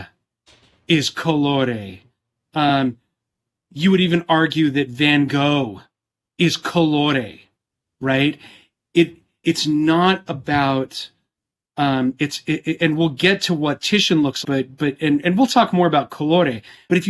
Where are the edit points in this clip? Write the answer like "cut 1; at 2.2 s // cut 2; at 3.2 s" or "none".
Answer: cut 1; at 12.1 s // cut 2; at 14.4 s